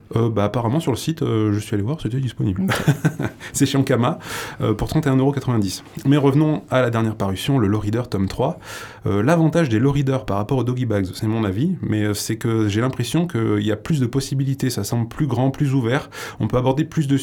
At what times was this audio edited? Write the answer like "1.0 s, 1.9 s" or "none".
none